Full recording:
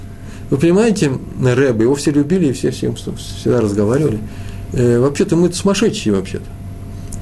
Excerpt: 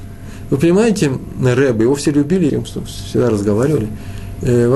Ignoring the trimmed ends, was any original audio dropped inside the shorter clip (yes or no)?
yes